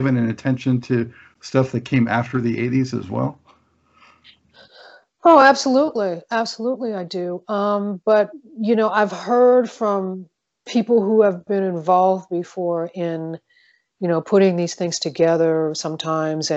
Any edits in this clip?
no; 0 cuts

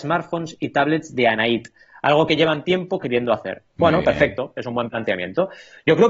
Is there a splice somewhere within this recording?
yes; 1 cut; at 3.7 s

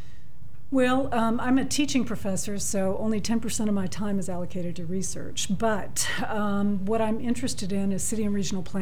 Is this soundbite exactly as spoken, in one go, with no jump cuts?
yes; 0 cuts

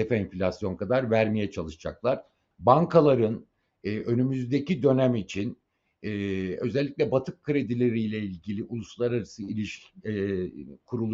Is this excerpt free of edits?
no; 1 cut; at 2.5 s

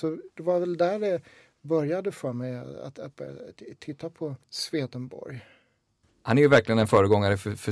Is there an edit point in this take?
yes; 1 cut; at 4.4 s

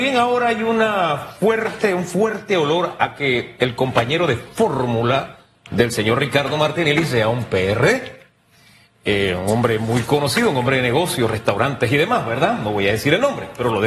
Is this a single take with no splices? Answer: yes; 0 cuts

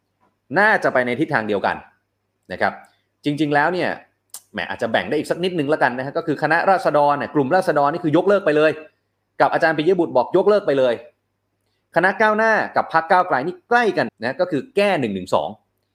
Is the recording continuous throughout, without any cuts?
no; 1 cut; at 14.1 s

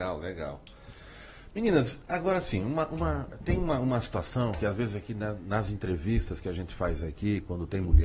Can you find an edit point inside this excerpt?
no; 0 cuts

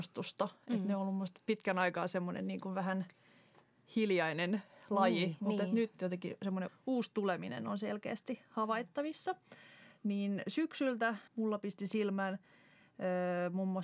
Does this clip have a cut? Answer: yes; 2 cuts; at 6.7 s, 11.3 s

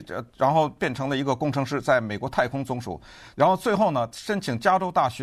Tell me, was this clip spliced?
yes; 1 cut; at 3.3 s

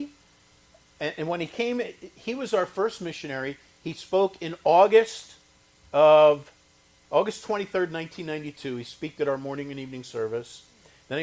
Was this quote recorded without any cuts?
yes; 0 cuts

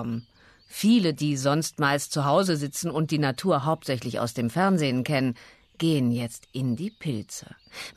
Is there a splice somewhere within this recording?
no; 0 cuts

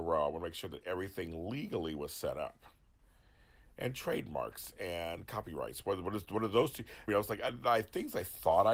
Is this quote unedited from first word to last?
no; 1 cut; at 7.1 s

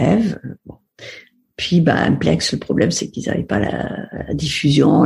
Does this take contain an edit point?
no; 0 cuts

